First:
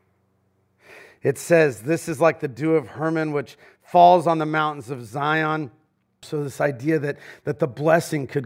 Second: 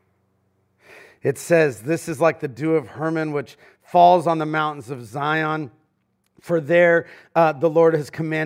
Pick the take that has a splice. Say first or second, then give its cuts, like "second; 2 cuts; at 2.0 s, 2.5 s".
first; 1 cut; at 6.2 s